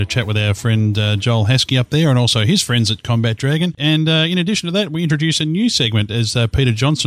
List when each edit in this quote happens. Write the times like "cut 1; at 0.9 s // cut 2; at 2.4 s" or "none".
cut 1; at 3.8 s